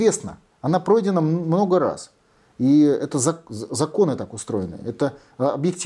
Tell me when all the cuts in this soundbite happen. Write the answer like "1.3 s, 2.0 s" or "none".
none